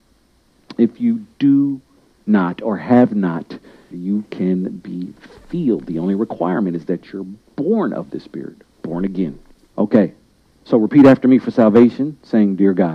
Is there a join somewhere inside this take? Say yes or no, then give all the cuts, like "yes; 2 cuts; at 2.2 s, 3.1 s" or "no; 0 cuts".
yes; 2 cuts; at 3.9 s, 9.7 s